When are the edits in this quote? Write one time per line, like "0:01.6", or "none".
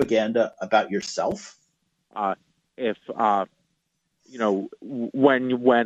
0:02.1